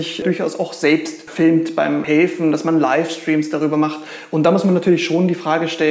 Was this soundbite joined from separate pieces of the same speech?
no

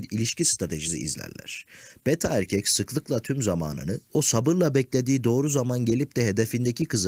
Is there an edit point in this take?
yes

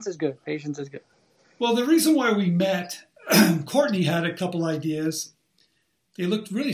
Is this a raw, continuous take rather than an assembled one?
yes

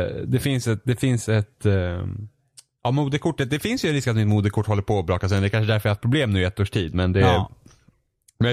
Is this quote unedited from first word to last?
yes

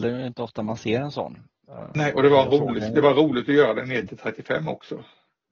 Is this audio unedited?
yes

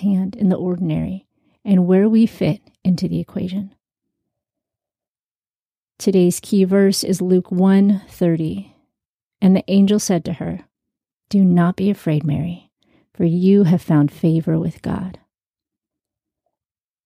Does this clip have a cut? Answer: no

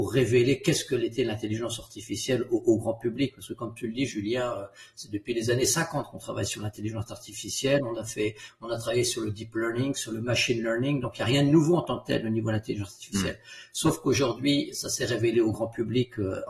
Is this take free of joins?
yes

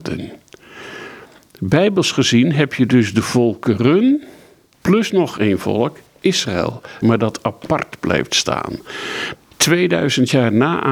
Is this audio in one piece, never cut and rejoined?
no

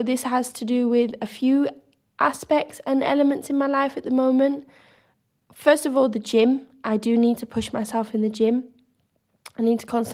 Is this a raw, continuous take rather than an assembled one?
yes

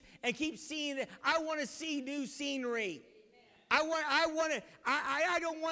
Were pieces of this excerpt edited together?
no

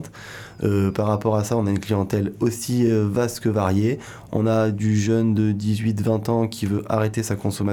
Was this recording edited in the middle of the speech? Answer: no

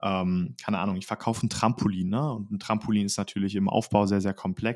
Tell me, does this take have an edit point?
no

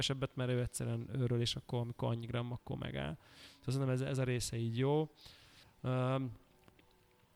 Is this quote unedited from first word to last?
no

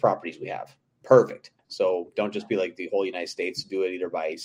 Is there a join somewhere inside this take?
yes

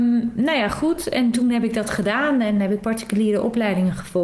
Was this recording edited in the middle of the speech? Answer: no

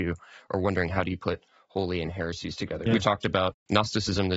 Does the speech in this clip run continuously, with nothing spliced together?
no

